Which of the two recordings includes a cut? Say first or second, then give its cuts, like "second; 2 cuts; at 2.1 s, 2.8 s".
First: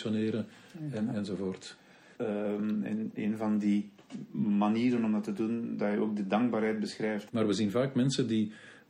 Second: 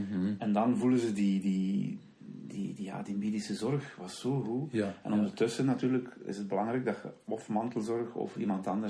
first; 2 cuts; at 2.1 s, 7.3 s